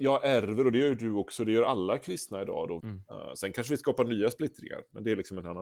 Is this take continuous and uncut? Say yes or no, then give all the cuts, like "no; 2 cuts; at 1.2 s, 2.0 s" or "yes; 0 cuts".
no; 1 cut; at 2.8 s